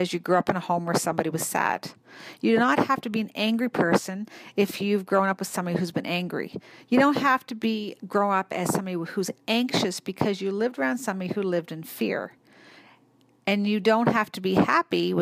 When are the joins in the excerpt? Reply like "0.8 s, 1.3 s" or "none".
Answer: 8.0 s